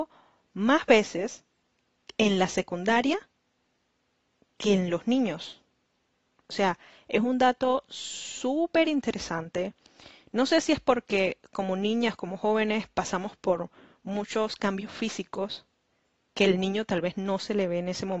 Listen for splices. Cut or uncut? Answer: uncut